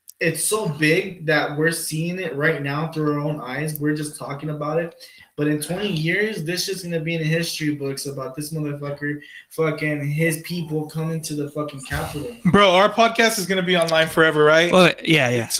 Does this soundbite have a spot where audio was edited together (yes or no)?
no